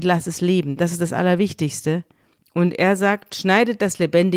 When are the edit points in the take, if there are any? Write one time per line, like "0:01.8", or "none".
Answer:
0:02.4